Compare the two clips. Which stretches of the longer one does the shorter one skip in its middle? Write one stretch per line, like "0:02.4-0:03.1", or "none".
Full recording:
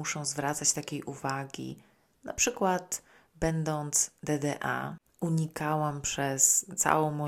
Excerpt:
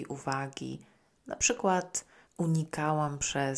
0:03.2-0:05.1